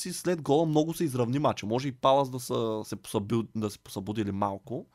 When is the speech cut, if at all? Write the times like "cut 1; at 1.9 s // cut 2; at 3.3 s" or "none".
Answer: none